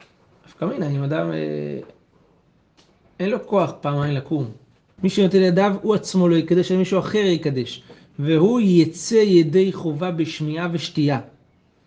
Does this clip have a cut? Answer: yes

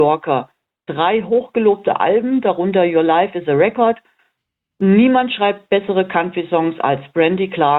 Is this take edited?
no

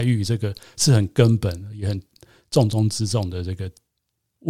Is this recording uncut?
yes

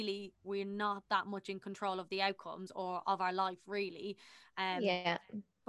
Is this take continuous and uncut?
yes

